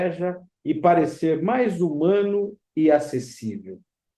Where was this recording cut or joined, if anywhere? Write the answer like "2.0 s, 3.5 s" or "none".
none